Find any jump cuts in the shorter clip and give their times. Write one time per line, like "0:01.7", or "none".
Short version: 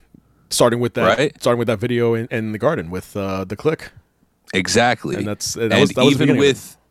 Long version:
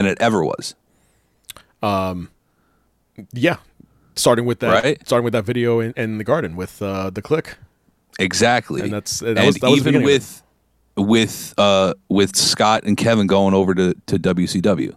none